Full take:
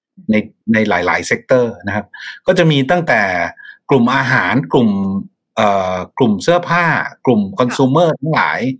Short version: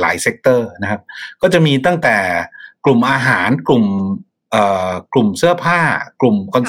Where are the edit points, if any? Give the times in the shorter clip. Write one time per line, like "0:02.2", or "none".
none